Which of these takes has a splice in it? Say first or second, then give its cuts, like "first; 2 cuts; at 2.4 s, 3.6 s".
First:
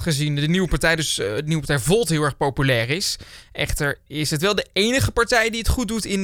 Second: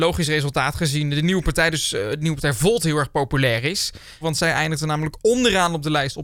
second; 1 cut; at 4.2 s